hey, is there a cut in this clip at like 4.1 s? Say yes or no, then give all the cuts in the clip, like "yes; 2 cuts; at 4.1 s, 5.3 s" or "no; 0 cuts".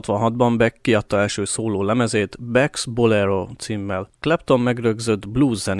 yes; 1 cut; at 4.1 s